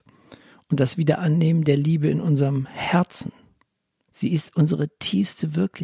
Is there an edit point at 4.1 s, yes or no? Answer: yes